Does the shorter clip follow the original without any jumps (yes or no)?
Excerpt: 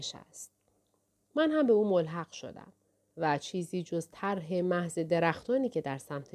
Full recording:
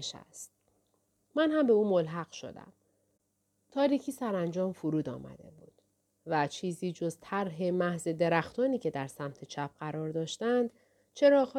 no